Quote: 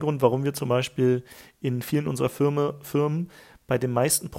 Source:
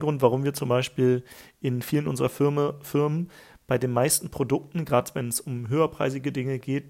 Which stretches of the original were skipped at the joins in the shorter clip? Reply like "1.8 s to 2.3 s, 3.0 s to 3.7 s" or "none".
none